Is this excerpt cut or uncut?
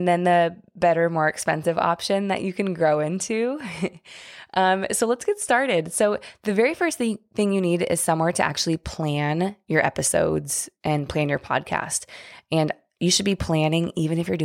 uncut